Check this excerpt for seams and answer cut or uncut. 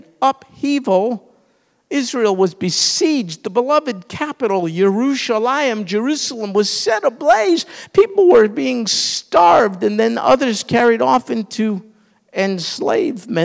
uncut